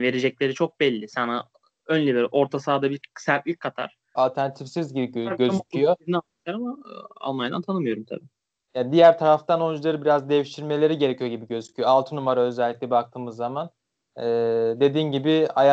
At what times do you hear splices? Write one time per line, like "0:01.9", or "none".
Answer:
0:04.2